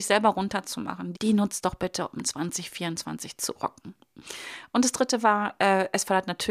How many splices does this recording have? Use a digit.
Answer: 1